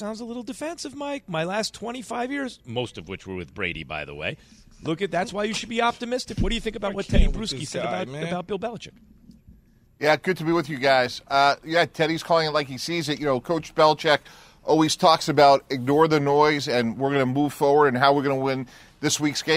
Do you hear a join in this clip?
no; 0 cuts

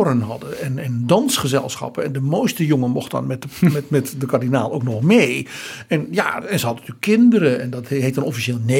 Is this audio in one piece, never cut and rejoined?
no; 1 cut; at 6.4 s

